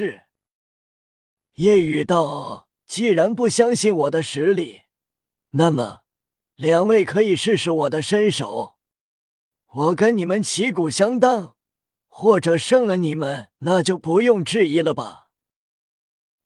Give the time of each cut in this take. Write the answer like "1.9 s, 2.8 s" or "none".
13.5 s